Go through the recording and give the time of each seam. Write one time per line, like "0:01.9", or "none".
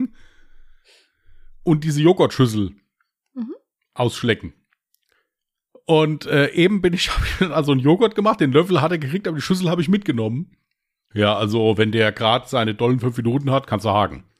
0:11.1